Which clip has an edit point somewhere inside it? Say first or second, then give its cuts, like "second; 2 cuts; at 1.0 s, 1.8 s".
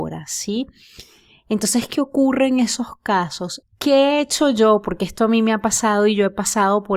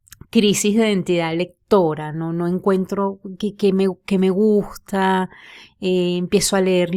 first; 1 cut; at 3.6 s